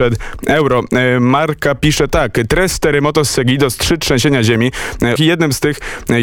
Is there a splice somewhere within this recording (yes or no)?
yes